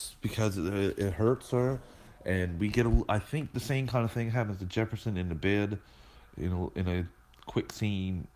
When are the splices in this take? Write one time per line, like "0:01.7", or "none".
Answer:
none